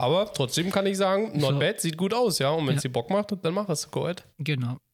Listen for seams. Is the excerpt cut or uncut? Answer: uncut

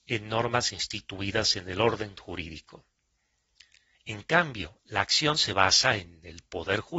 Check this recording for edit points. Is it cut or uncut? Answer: cut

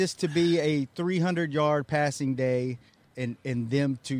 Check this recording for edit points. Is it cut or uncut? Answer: cut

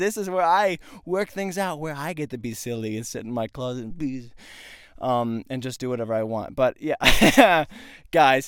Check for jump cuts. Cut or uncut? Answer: uncut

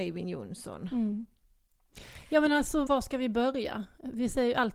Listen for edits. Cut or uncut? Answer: cut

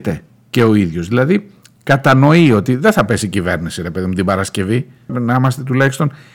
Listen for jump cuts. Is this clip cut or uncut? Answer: cut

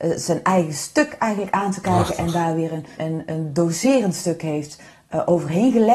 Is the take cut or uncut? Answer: cut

